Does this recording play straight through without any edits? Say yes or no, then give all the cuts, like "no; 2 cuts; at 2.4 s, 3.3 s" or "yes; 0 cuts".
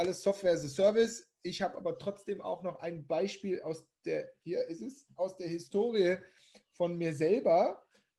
yes; 0 cuts